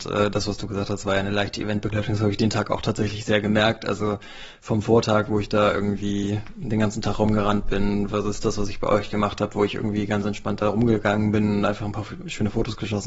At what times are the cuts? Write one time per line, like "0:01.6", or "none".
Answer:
none